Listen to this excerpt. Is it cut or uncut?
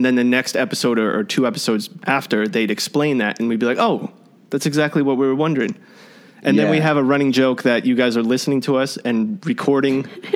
uncut